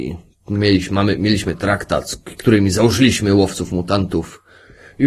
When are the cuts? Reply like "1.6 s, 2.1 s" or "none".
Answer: none